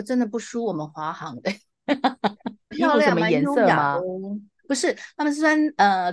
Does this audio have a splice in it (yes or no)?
yes